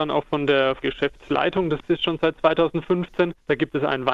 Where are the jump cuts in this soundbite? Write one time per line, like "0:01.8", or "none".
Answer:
none